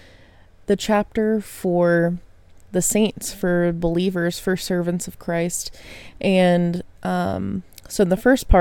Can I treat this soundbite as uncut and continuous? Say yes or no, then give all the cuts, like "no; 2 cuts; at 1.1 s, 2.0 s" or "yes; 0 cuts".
yes; 0 cuts